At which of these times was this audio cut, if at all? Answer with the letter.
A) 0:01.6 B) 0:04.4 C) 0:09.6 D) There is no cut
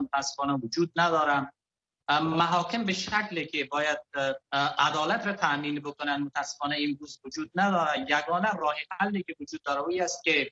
B